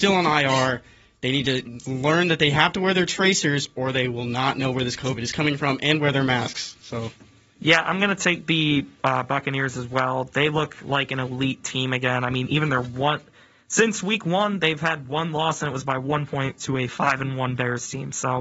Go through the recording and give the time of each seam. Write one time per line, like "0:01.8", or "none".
none